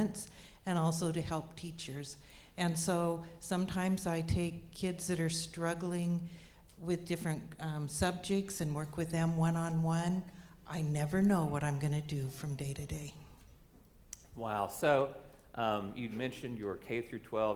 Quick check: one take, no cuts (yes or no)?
yes